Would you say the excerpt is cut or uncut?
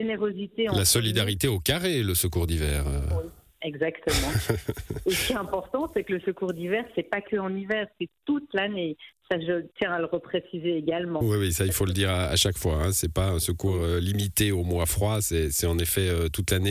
uncut